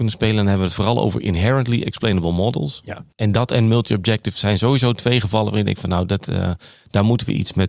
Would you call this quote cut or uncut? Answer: cut